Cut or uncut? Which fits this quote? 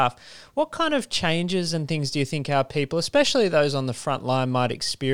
uncut